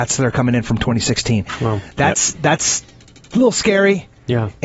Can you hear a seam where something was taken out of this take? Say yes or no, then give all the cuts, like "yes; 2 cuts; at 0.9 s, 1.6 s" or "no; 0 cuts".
no; 0 cuts